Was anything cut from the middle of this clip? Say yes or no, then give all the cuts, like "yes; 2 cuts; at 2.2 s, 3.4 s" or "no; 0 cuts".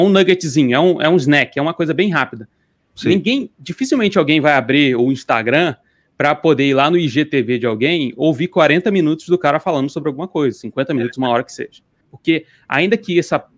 yes; 1 cut; at 12.0 s